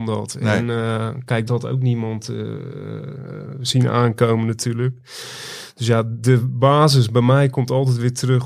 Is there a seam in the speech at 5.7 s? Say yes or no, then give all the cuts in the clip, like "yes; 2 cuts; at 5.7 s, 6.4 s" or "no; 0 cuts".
no; 1 cut; at 1.5 s